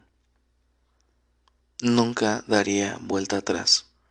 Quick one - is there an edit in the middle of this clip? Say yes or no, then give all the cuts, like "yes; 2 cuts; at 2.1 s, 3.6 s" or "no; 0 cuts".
yes; 1 cut; at 1.6 s